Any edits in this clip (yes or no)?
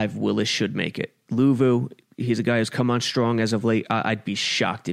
no